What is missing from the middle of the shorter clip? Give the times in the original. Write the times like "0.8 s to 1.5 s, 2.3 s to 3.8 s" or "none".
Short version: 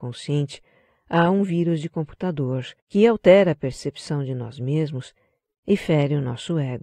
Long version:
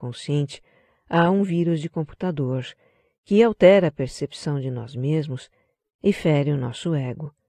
2.8 s to 3.2 s